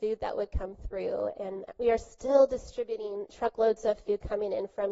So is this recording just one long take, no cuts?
yes; 0 cuts

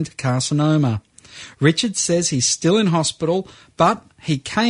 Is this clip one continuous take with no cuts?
yes; 0 cuts

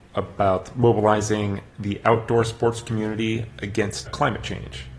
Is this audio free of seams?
no; 2 cuts; at 1.7 s, 4.1 s

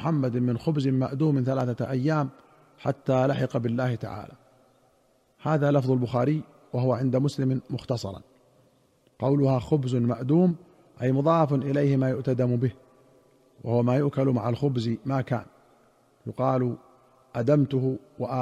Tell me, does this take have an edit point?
no; 0 cuts

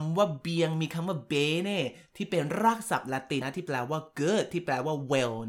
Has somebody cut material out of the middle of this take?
yes; 1 cut; at 3.4 s

